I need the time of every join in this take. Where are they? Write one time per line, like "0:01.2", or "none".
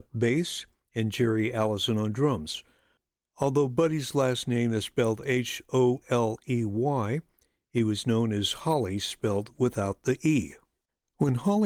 0:06.0